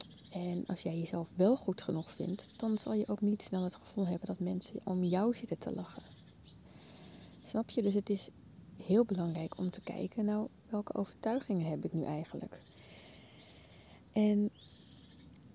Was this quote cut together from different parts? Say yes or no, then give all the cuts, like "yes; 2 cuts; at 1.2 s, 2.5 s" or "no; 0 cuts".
no; 0 cuts